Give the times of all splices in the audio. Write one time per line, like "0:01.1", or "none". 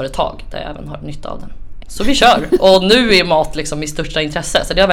0:01.8